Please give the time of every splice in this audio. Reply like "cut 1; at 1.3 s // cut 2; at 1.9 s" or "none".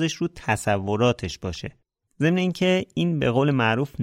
cut 1; at 2.0 s

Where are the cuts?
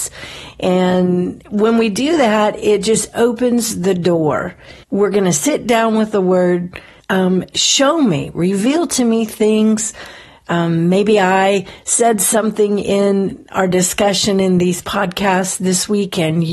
cut 1; at 4.8 s // cut 2; at 7.0 s

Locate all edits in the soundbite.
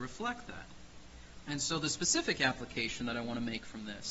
cut 1; at 1.4 s

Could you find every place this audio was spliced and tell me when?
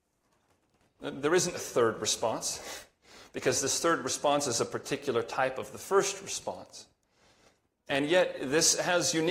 cut 1; at 1.5 s

